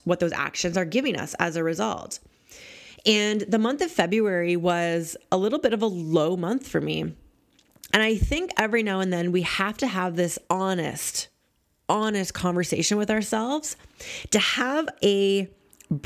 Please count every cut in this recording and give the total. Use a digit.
2